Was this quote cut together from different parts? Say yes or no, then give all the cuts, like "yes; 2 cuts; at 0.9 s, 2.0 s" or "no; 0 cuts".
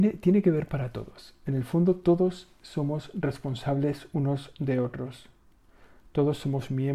no; 0 cuts